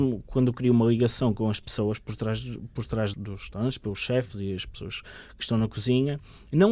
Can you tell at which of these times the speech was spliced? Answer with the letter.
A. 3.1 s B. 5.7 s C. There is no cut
A